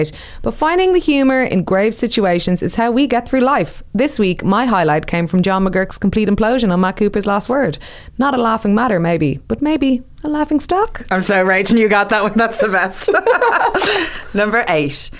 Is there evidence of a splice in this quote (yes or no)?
no